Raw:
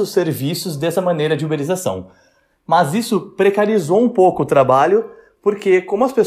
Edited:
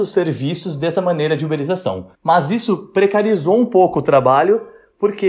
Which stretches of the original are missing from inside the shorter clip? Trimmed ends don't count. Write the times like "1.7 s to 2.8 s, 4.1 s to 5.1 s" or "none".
2.1 s to 2.6 s